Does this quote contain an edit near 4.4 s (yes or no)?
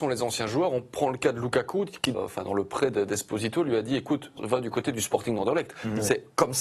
yes